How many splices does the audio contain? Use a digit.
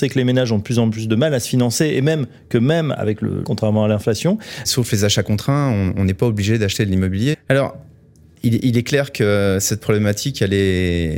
3